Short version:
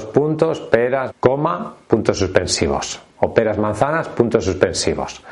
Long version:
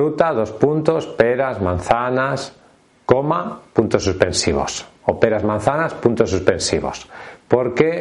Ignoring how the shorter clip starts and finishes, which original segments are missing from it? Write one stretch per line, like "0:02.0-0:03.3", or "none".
0:01.5-0:02.9